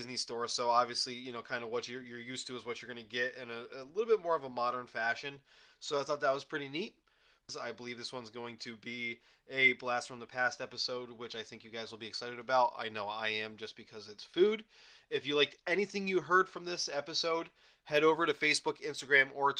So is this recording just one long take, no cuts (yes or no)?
no